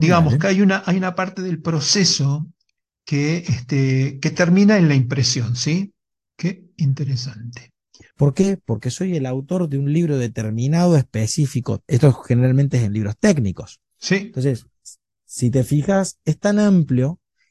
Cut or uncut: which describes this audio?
cut